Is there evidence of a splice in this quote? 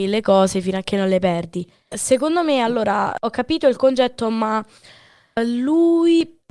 yes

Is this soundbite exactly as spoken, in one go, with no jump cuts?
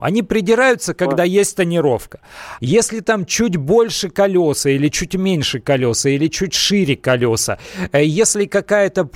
no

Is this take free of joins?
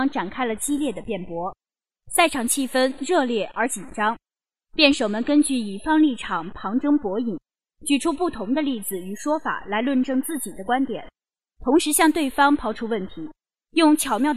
yes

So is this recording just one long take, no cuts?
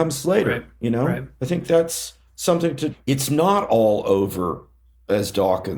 no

